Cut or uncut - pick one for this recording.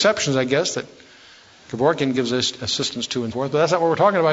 cut